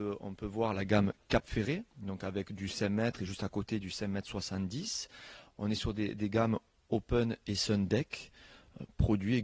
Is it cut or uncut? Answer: uncut